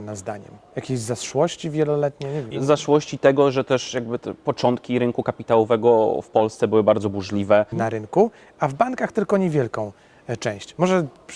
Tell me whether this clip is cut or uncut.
cut